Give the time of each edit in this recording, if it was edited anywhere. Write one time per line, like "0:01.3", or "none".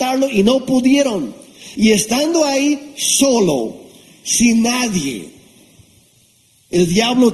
0:01.8